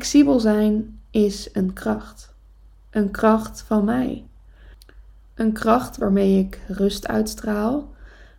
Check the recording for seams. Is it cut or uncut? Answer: uncut